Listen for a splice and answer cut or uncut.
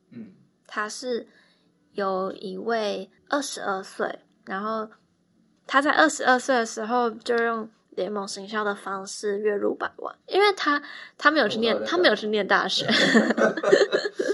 cut